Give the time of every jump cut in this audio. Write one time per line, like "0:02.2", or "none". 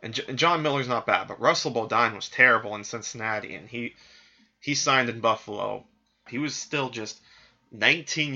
0:06.3